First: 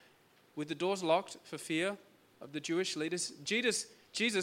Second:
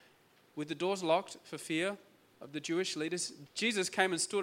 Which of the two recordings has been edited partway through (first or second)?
second